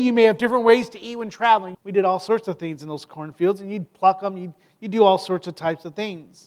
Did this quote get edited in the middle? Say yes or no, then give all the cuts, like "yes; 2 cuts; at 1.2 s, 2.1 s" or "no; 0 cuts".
yes; 1 cut; at 1.7 s